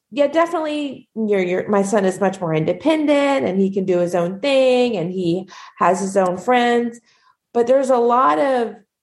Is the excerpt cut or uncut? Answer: uncut